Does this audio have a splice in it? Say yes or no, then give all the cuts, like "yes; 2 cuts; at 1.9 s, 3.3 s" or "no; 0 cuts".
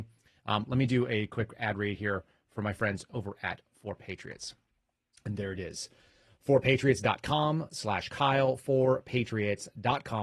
no; 0 cuts